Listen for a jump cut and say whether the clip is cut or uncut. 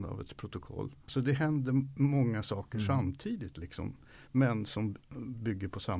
cut